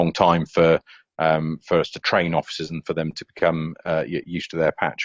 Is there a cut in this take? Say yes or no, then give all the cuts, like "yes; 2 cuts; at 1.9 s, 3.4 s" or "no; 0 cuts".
no; 0 cuts